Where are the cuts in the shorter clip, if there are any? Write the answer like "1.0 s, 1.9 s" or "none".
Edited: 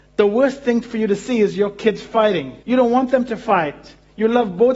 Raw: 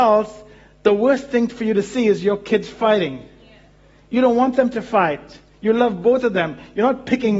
2.6 s